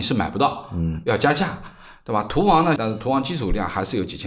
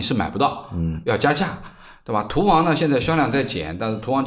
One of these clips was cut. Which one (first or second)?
first